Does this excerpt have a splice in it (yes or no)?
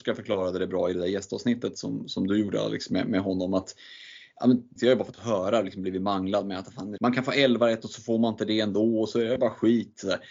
yes